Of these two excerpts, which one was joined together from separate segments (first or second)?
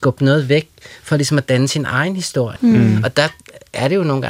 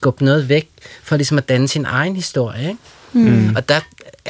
first